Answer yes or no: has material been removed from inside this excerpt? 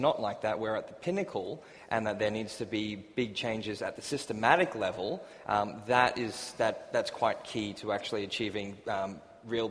no